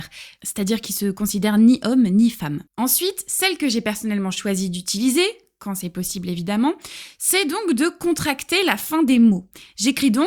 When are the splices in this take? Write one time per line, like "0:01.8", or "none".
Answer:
0:02.7